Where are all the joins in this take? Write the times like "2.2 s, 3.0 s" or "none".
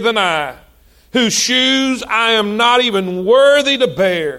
none